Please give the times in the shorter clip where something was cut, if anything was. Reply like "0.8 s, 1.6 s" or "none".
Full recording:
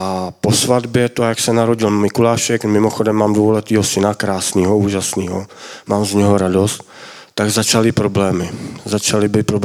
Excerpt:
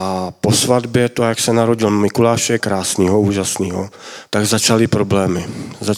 2.6 s, 4.2 s